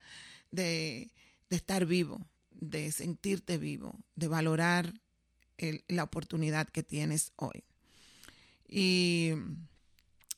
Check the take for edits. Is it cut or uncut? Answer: uncut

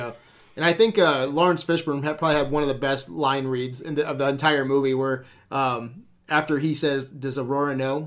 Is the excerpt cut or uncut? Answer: uncut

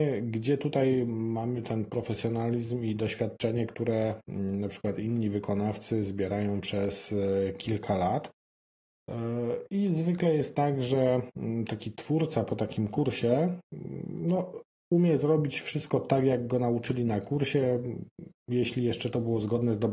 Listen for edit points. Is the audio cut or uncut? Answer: uncut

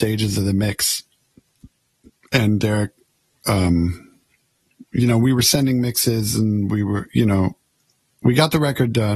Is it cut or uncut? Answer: uncut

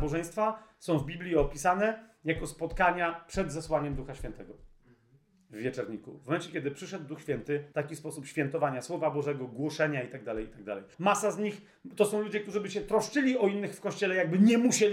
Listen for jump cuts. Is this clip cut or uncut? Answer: cut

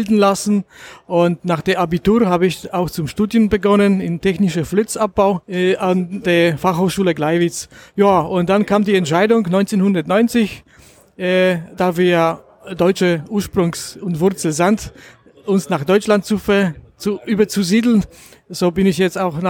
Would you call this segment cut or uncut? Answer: cut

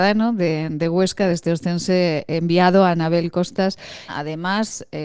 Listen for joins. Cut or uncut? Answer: cut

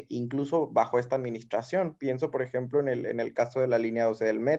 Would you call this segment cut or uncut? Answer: uncut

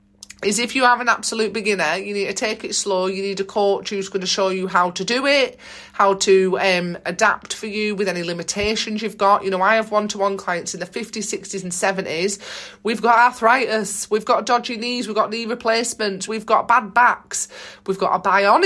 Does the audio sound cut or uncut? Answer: cut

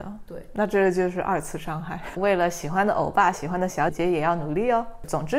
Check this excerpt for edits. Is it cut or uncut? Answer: cut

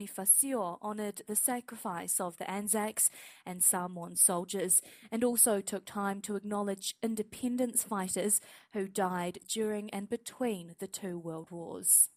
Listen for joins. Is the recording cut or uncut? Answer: uncut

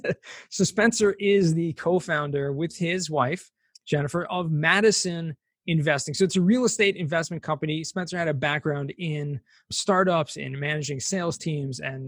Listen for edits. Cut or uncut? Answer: uncut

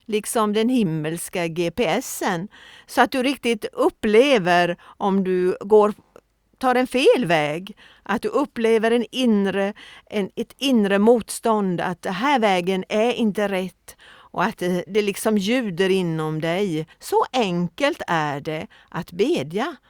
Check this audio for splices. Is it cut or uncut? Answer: cut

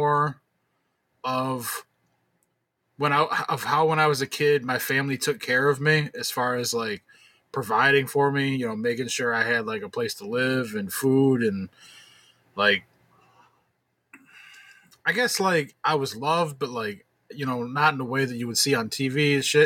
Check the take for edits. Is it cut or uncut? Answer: uncut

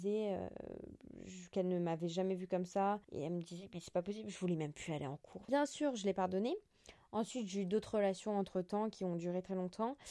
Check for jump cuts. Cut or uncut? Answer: cut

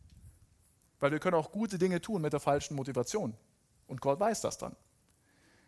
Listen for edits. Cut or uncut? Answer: uncut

